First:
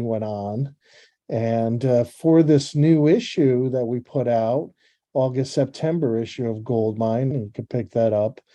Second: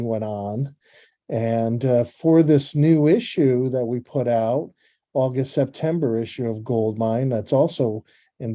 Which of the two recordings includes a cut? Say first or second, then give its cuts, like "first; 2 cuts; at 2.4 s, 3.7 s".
first; 1 cut; at 7.3 s